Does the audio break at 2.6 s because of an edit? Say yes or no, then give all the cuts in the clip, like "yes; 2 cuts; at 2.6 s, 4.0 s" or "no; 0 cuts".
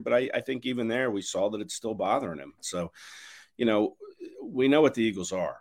yes; 1 cut; at 2.6 s